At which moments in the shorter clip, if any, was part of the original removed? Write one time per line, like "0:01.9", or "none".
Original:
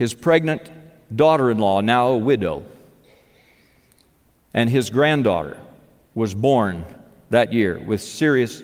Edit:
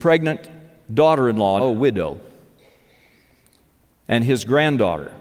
0:01.6

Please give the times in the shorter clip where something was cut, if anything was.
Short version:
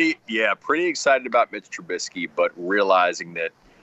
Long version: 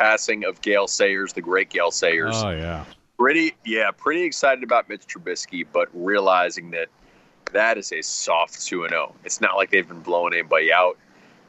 none

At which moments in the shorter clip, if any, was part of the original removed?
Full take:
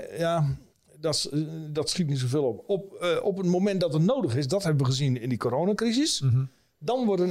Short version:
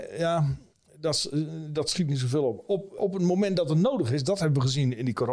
0:03.0

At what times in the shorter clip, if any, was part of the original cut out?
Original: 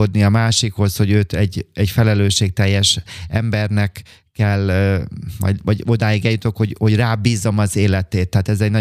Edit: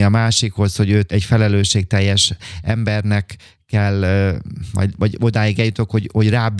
0:01.1

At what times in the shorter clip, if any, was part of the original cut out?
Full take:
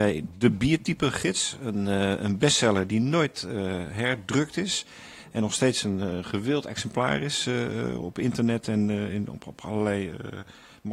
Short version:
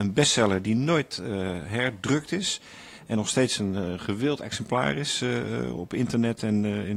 none

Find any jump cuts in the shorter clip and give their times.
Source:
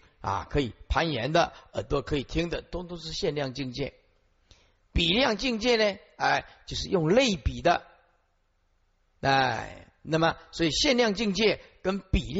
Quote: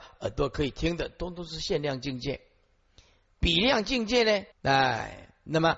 0:04.5

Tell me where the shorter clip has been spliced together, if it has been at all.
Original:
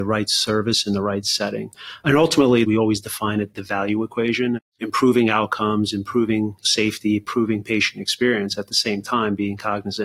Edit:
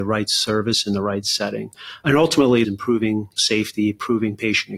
0:02.6

